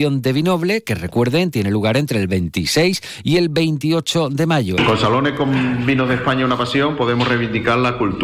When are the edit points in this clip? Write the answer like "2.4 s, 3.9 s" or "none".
4.8 s